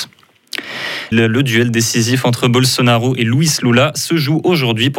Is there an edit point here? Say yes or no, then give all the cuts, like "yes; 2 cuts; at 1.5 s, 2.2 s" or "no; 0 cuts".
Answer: yes; 1 cut; at 1.1 s